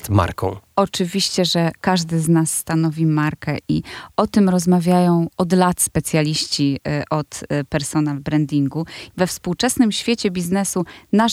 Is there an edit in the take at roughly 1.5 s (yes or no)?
no